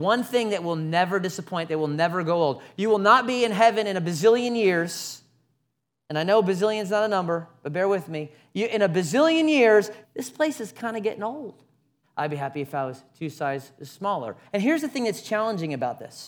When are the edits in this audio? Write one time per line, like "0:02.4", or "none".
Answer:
0:10.0
0:12.0
0:14.4